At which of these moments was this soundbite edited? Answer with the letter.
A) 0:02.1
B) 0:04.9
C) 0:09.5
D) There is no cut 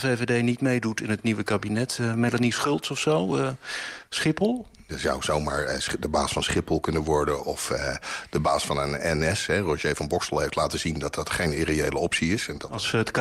B